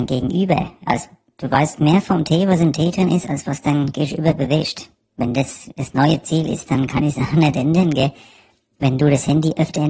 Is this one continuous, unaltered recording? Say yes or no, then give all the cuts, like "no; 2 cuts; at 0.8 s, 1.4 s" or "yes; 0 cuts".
yes; 0 cuts